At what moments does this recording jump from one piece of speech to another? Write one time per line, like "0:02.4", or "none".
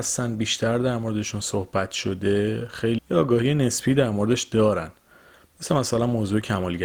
0:03.0